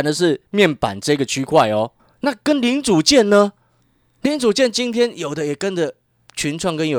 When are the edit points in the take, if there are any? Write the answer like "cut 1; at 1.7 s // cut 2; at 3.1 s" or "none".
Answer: none